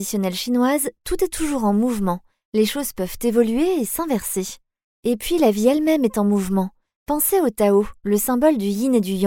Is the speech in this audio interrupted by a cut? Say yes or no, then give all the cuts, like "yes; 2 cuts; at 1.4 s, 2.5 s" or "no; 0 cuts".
no; 0 cuts